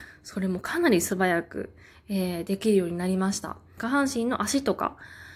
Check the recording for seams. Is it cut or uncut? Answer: cut